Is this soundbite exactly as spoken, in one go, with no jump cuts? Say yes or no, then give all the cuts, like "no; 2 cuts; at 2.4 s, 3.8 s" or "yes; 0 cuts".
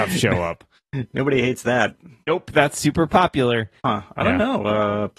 no; 1 cut; at 3.8 s